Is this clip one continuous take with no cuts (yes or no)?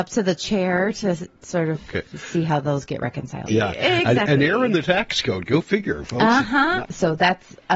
no